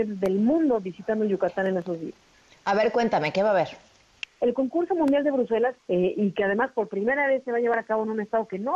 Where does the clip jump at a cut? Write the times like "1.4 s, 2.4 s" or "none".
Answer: 4.3 s, 5.8 s